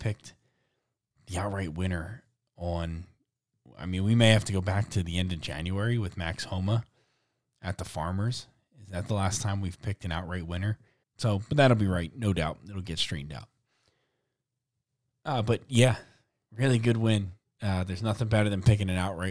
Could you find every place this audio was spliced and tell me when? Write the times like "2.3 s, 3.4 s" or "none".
11.0 s